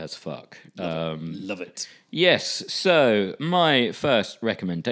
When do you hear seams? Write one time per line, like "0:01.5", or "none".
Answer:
none